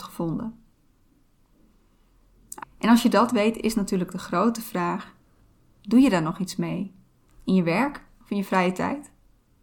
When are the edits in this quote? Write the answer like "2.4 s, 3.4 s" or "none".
2.6 s